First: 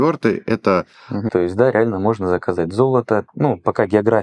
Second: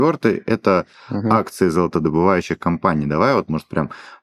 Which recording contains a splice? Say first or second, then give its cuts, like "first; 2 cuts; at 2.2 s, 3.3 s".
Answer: first; 2 cuts; at 1.3 s, 3.3 s